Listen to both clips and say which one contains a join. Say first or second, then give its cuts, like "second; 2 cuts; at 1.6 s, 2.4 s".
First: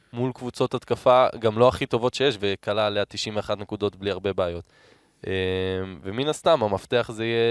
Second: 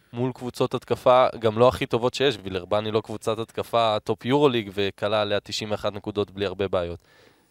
first; 1 cut; at 2.4 s